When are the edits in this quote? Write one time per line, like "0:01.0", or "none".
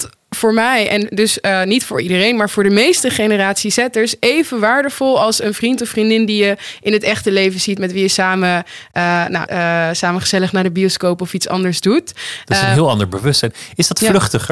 0:09.5